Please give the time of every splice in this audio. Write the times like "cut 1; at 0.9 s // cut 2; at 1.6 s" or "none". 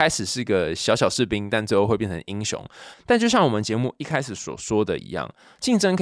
cut 1; at 2.9 s